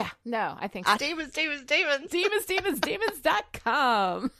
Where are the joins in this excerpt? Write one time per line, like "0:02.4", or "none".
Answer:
0:01.0